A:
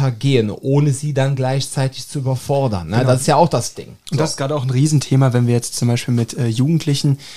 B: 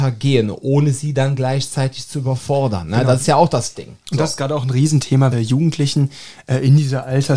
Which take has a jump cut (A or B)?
B